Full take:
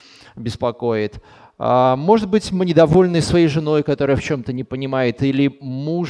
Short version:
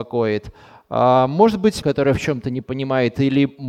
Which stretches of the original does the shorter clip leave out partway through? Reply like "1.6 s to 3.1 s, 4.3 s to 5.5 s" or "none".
2.5 s to 3.8 s